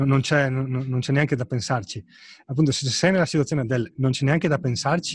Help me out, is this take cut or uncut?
uncut